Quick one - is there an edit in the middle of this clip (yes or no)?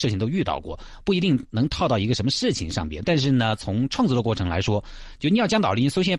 no